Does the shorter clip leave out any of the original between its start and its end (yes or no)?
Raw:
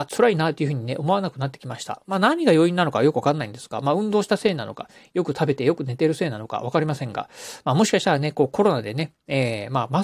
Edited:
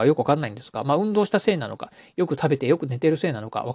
no